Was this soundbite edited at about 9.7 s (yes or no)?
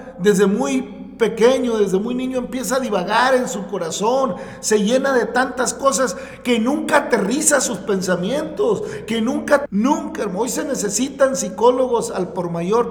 yes